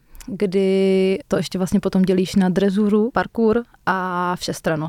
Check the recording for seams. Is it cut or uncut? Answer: cut